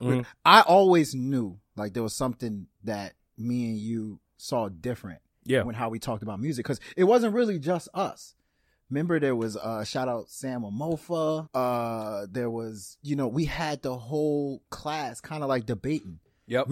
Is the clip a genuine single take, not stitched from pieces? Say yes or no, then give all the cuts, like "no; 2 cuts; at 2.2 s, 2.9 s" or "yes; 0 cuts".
no; 1 cut; at 11.5 s